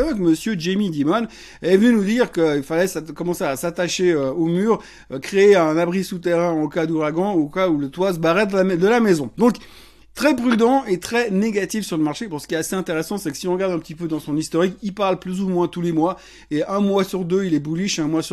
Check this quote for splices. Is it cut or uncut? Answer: uncut